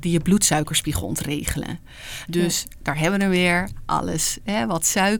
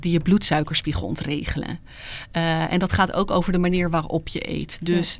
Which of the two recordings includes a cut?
first; 1 cut; at 2.3 s

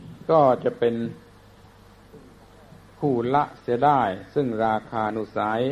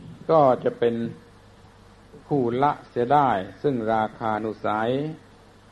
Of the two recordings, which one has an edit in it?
second; 1 cut; at 2.2 s

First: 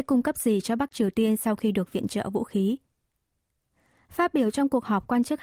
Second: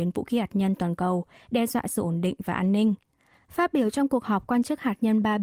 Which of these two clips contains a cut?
second; 1 cut; at 3.4 s

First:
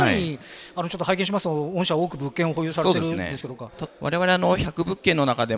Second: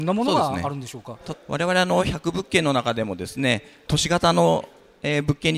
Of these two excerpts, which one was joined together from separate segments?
first; 1 cut; at 3.6 s

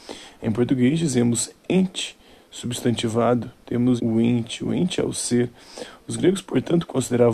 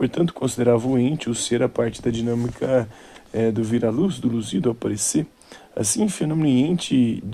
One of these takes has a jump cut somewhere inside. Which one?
first; 1 cut; at 4.0 s

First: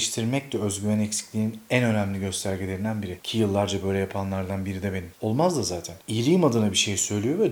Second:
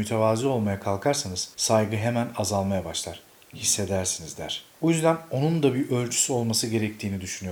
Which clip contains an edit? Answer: first; 1 cut; at 5.1 s

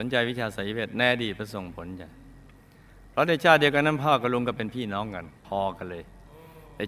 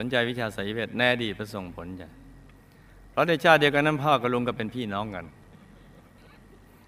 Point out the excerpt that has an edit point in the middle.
first; 1 cut; at 5.4 s

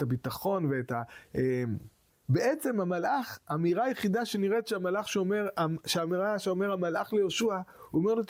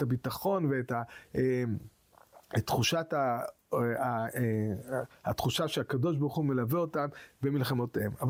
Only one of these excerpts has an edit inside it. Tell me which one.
first; 1 cut; at 2.1 s

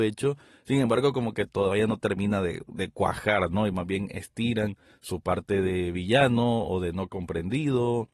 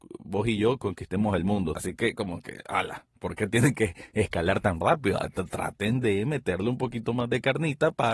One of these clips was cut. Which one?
second; 1 cut; at 1.7 s

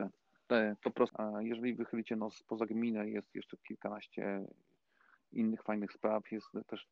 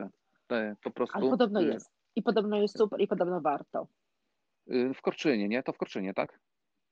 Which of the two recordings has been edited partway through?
first; 1 cut; at 1.1 s

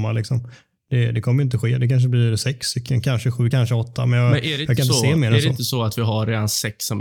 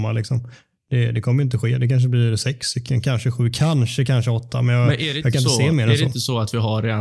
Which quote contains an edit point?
first; 1 cut; at 3.5 s

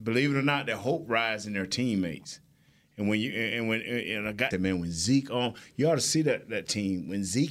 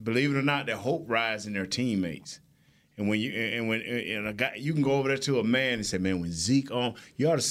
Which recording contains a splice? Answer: first; 1 cut; at 4.5 s

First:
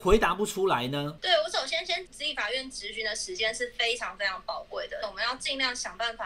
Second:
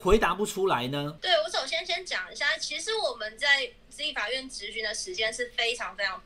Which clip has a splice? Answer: first; 2 cuts; at 2.1 s, 5.0 s

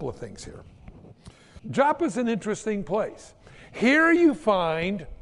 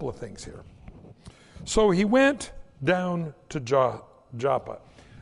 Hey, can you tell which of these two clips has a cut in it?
first; 1 cut; at 1.6 s

